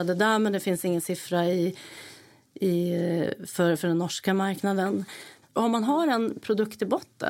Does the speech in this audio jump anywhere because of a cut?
yes; 1 cut; at 5.4 s

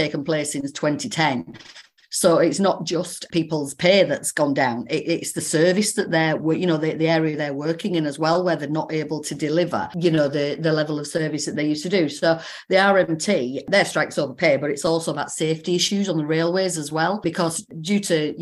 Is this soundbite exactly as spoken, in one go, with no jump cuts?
yes; 0 cuts

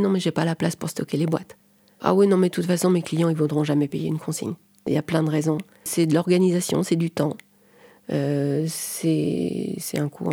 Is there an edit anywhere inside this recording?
no; 0 cuts

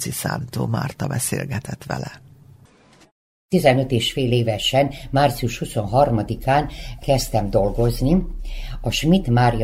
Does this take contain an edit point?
no; 0 cuts

